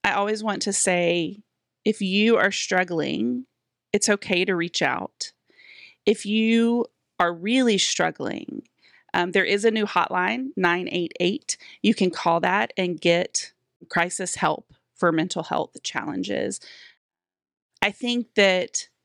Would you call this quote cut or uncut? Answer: uncut